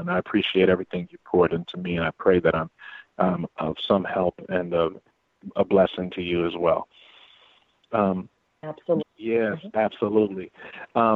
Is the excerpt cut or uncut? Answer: cut